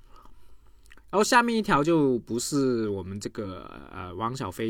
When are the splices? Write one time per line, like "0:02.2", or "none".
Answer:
none

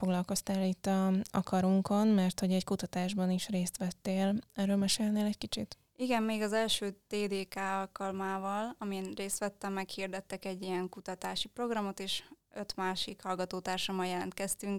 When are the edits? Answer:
none

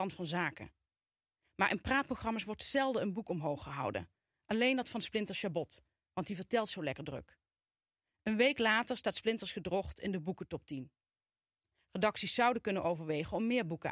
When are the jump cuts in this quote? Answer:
none

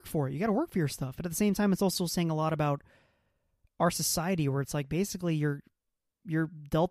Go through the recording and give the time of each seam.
none

